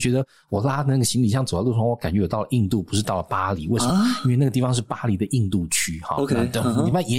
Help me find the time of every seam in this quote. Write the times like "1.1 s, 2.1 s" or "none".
none